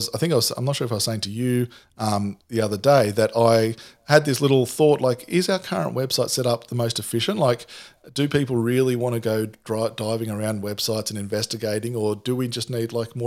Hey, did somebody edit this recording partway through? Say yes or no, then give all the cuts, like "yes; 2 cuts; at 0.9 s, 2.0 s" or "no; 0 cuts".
no; 0 cuts